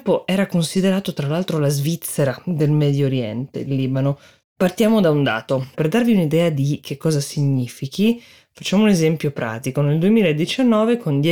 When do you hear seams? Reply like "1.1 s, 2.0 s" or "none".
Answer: 5.7 s